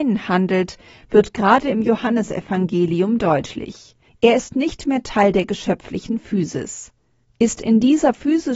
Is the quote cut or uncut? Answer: cut